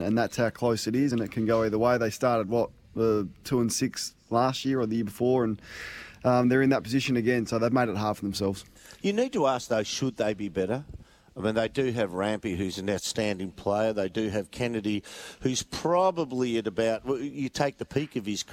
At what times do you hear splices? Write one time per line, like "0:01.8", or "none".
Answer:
none